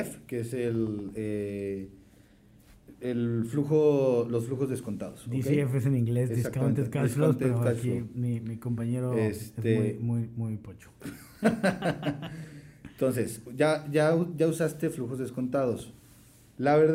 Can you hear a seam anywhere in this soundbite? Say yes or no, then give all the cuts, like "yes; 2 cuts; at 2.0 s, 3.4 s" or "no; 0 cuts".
no; 0 cuts